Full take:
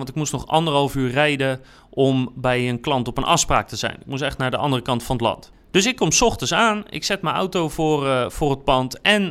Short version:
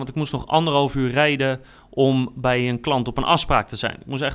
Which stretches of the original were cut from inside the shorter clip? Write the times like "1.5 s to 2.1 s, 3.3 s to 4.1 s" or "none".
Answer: none